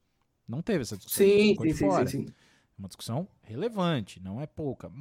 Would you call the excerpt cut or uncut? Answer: cut